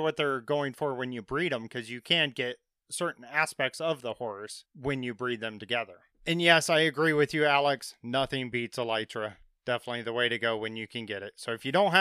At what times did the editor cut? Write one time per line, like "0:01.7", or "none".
none